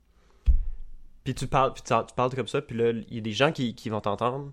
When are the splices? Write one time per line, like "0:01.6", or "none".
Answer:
none

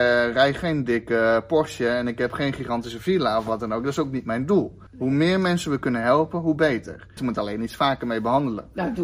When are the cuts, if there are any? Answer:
0:04.9
0:07.2

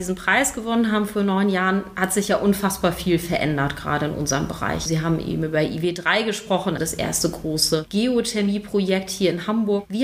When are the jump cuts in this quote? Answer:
0:04.9
0:06.8

